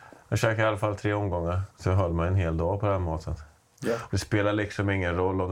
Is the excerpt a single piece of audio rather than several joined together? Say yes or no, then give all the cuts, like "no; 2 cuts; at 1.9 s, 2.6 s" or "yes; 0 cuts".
no; 2 cuts; at 1.7 s, 4.1 s